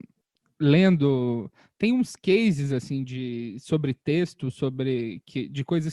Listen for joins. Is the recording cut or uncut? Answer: uncut